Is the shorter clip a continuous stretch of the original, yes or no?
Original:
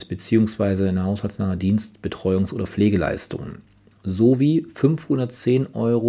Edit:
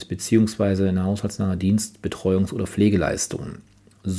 yes